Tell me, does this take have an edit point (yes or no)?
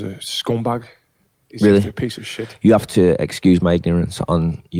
no